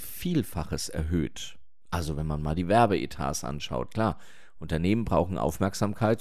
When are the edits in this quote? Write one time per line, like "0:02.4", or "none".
none